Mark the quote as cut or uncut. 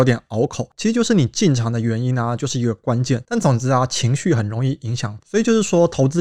cut